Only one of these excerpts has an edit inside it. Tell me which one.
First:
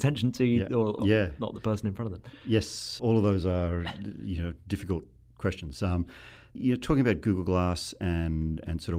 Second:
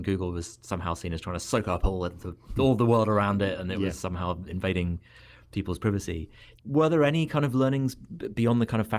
first; 1 cut; at 1.0 s

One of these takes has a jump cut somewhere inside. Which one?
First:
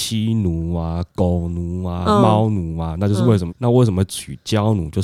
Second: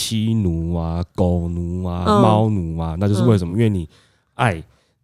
first; 1 cut; at 3.5 s

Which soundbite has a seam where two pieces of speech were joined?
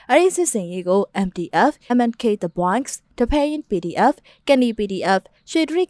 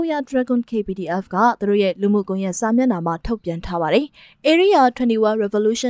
first; 1 cut; at 1.9 s

